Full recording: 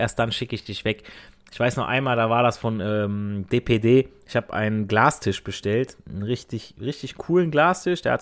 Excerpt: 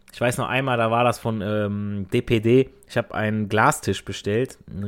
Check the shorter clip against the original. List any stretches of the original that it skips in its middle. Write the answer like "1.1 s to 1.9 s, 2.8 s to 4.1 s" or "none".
none